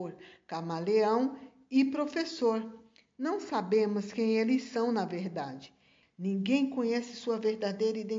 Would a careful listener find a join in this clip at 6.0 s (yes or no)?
yes